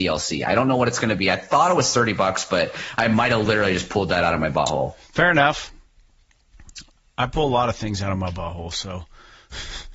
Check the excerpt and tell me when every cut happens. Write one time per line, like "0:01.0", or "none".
none